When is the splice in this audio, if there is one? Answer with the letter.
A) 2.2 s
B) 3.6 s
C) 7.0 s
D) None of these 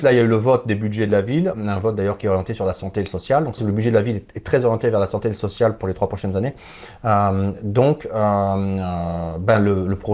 B